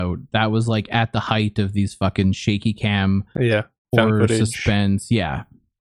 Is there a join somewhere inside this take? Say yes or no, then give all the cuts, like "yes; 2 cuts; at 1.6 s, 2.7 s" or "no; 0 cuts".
no; 0 cuts